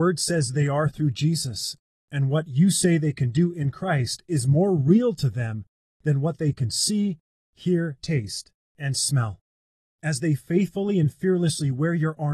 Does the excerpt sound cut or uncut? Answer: cut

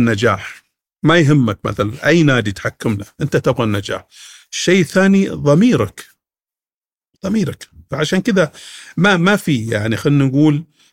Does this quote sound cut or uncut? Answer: uncut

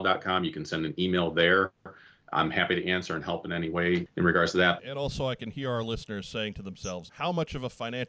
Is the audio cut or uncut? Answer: cut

